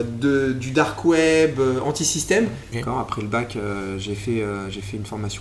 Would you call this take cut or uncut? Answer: cut